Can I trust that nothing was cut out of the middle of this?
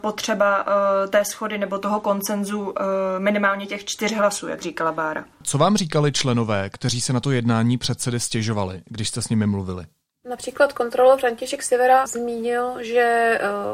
no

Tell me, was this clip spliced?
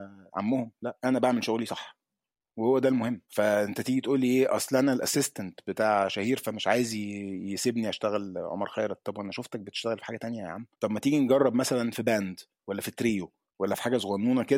yes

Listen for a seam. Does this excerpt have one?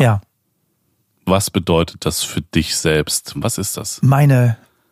yes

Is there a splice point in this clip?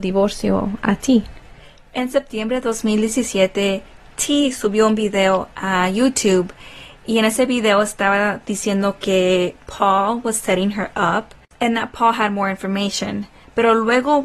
no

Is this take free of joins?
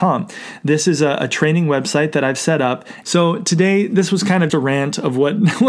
no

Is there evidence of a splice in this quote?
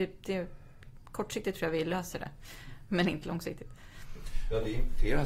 no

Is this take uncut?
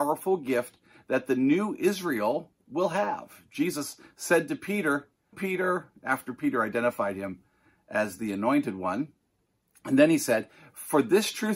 no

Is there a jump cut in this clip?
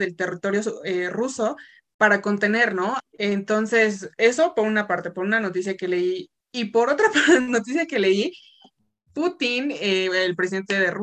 yes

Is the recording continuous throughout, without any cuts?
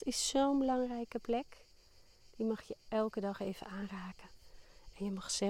yes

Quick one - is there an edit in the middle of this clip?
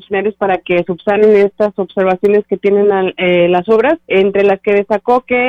yes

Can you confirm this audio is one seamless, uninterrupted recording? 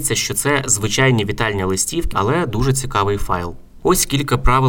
no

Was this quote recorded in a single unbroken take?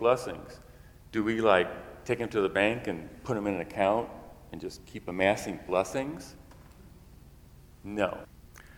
yes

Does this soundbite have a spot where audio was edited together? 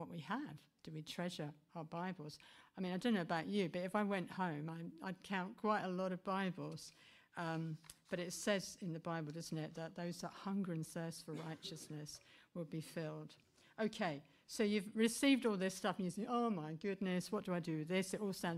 no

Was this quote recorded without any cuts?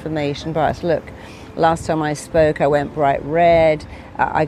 yes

